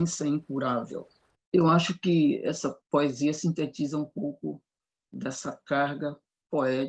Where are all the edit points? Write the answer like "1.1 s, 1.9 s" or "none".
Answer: 1.3 s, 2.8 s

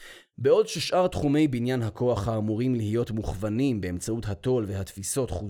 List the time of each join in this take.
none

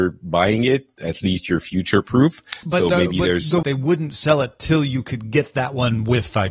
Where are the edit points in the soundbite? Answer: 3.6 s

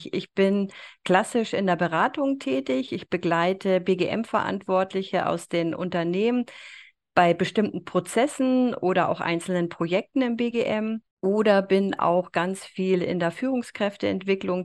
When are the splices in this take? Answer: 2.9 s, 11.1 s

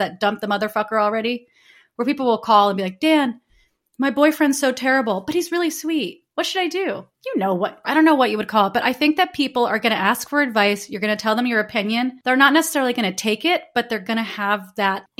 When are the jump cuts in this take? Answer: 7.8 s

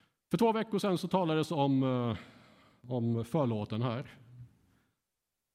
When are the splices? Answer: none

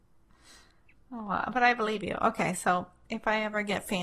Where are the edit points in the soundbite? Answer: none

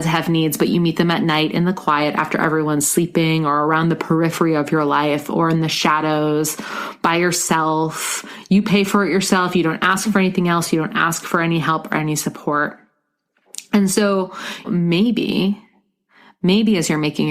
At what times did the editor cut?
14.6 s

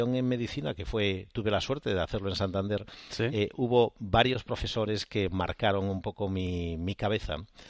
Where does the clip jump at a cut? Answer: none

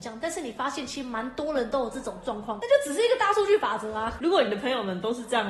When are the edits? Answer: 4.2 s

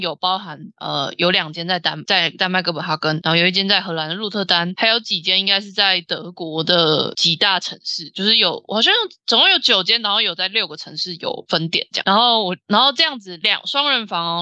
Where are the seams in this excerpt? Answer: 11.5 s, 13.4 s

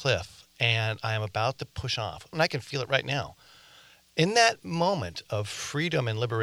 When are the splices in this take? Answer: 2.3 s

